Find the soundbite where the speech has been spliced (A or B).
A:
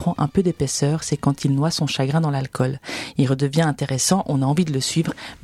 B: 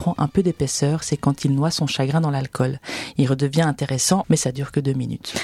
B